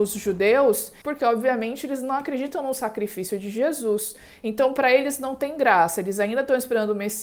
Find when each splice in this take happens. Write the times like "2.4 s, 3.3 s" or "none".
1.0 s